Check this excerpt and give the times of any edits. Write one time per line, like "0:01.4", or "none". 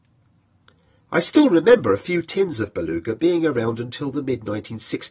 0:01.0